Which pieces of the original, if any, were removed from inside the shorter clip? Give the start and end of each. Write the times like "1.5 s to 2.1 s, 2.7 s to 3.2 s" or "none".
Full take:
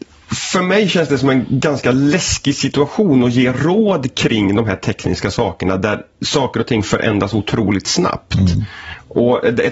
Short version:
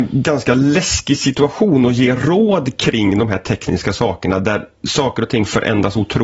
none